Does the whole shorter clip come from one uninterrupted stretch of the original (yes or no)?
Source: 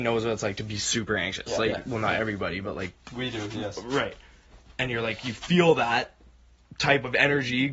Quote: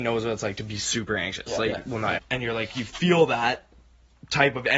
no